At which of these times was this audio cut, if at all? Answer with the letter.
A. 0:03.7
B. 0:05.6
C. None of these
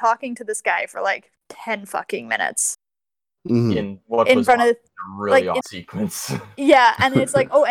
B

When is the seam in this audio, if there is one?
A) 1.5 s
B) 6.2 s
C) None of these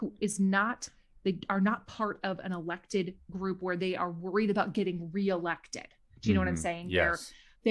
C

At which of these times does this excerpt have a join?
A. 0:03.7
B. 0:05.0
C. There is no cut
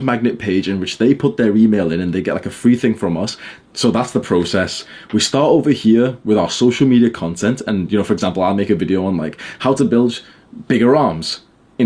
A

